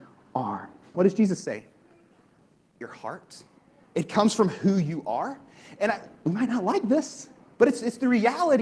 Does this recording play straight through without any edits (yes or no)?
no